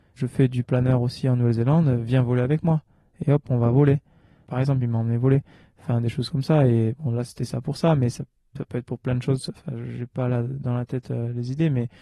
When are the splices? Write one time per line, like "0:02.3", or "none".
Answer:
none

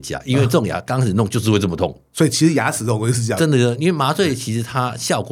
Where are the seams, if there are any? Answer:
none

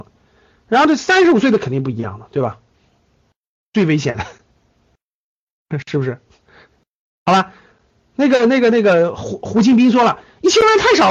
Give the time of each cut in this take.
0:03.7

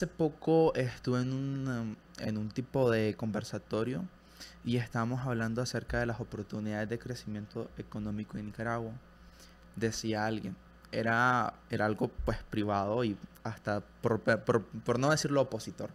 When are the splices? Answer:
none

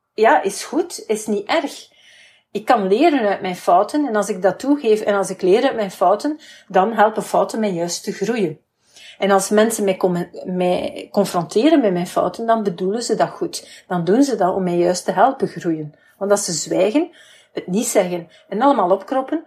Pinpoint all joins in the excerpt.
none

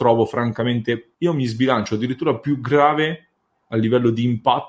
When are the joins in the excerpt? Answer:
0:01.1

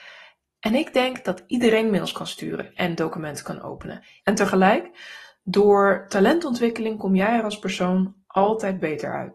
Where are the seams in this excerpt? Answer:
0:04.2

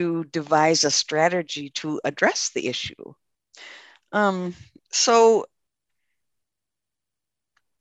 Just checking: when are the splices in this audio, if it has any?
none

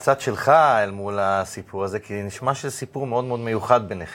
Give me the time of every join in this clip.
none

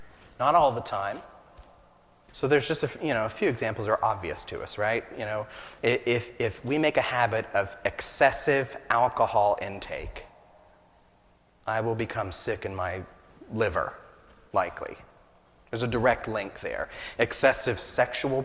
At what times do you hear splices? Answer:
0:02.3
0:17.2

